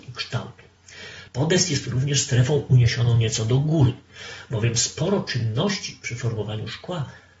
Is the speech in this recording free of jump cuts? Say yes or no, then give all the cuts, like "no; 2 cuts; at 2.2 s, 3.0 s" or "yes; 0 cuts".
no; 1 cut; at 1.3 s